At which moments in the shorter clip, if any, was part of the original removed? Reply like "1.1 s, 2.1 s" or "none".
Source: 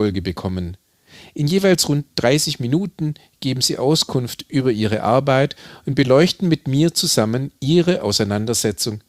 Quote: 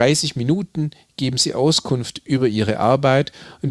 none